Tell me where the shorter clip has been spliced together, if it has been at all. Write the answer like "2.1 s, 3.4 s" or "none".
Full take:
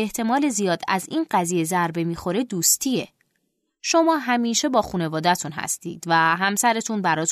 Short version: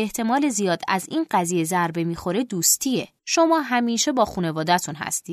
3.2 s